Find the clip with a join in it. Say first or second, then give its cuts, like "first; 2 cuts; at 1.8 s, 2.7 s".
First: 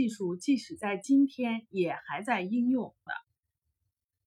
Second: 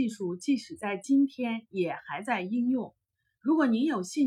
first; 1 cut; at 3.1 s